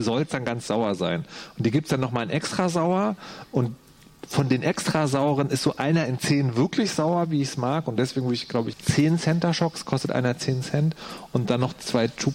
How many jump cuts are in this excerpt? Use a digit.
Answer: 1